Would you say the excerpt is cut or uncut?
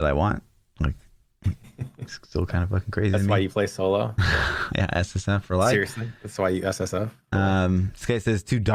uncut